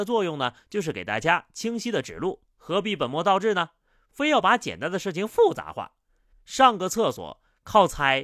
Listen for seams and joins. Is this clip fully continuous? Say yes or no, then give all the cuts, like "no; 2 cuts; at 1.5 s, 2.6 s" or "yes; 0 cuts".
no; 1 cut; at 6.3 s